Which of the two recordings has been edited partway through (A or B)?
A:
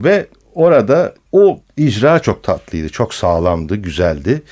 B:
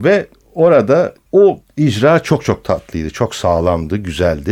A